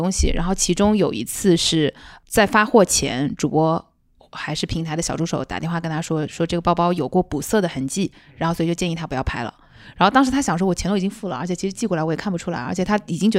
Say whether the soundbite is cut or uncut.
uncut